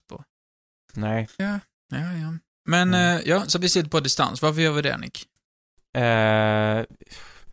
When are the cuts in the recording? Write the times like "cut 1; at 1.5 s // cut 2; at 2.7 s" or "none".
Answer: cut 1; at 1.4 s